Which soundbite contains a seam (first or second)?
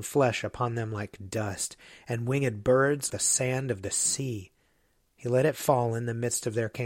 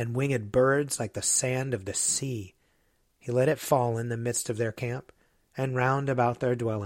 first